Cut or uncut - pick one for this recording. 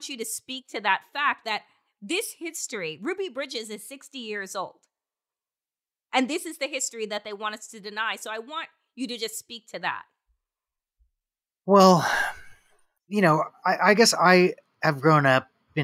uncut